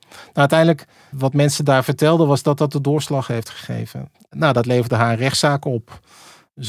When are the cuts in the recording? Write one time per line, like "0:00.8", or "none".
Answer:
0:01.1
0:04.1